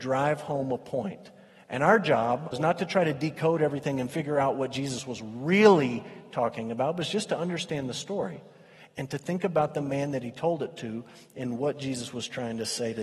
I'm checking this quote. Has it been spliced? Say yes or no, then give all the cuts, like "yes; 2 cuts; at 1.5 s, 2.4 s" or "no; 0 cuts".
yes; 1 cut; at 2.5 s